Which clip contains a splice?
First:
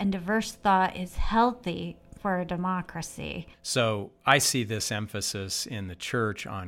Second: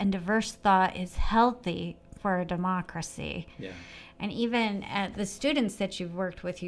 first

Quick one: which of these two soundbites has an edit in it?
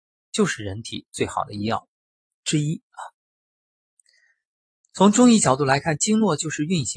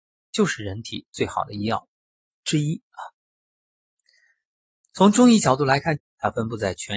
second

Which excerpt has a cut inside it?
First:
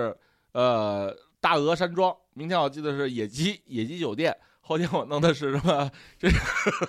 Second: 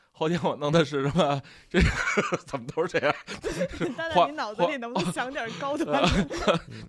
first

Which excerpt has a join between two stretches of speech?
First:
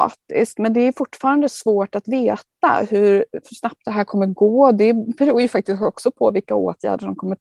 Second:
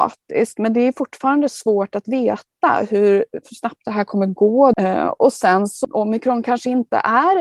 second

